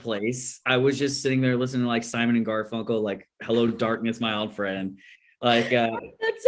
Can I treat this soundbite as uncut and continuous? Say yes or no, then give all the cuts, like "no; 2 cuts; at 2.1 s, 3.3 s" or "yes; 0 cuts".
yes; 0 cuts